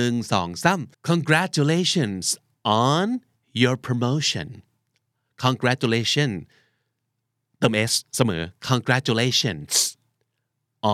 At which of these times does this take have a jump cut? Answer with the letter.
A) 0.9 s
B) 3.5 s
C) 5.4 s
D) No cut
A